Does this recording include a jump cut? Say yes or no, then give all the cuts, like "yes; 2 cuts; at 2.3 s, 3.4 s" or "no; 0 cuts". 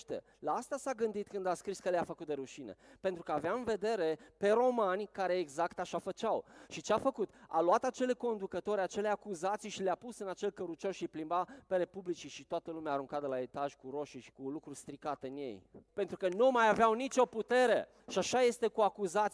yes; 3 cuts; at 14.3 s, 15.9 s, 18.0 s